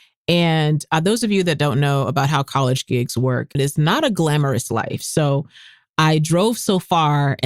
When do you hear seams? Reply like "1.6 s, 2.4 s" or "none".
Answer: 3.5 s, 5.0 s